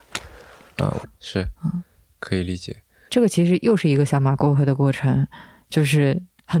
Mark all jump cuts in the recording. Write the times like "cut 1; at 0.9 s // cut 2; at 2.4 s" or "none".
cut 1; at 1.0 s